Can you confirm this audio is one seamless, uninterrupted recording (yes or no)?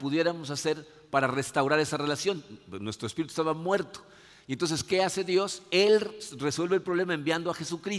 yes